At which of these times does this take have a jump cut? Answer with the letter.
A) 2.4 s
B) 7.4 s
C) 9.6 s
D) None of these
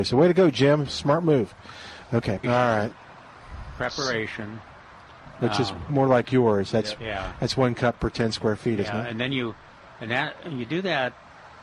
A